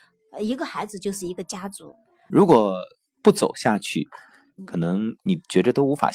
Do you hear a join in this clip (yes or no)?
yes